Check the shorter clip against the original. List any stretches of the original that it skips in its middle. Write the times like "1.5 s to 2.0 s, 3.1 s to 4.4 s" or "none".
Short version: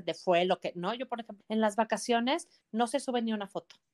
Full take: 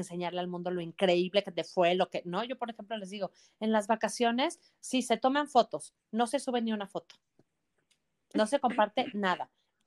2.9 s to 3.5 s, 4.7 s to 6.0 s